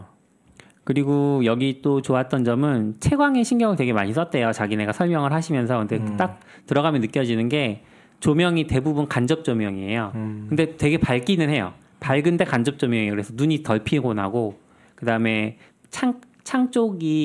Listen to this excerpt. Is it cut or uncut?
uncut